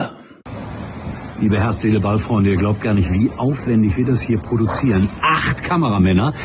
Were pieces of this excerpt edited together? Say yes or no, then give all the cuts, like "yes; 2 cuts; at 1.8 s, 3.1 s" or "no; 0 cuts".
no; 0 cuts